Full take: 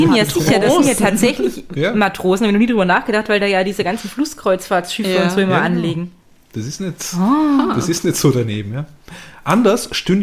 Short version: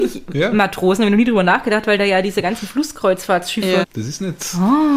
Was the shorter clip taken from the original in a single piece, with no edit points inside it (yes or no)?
no